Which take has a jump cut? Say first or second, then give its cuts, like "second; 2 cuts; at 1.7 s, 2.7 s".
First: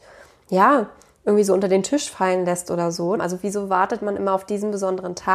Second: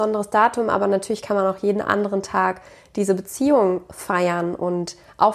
first; 1 cut; at 3.2 s